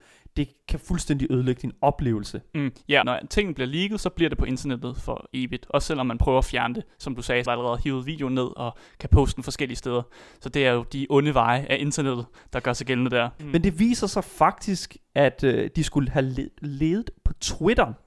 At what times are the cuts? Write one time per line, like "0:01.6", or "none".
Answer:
0:03.0
0:07.5
0:13.4